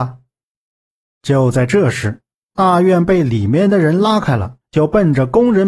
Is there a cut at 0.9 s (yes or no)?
no